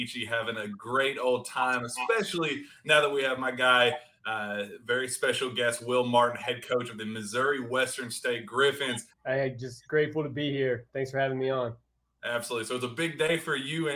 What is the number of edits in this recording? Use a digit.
1